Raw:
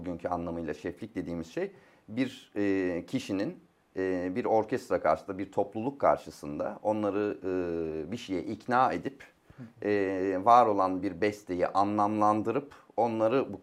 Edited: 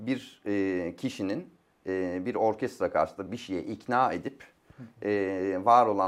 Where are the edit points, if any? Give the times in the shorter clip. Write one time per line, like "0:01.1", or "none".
0:03.3